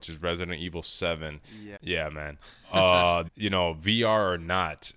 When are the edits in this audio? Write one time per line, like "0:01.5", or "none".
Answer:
0:01.8
0:03.3